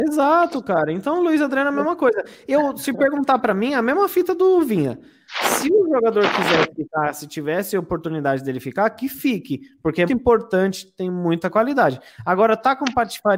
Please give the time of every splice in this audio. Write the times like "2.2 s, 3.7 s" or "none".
10.1 s